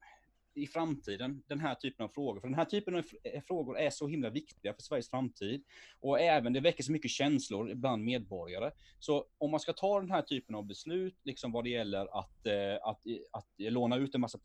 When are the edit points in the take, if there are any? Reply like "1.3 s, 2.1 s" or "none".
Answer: none